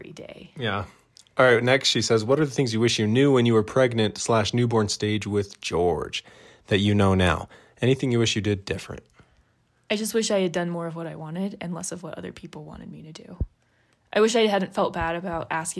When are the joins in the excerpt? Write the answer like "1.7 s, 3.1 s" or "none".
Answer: none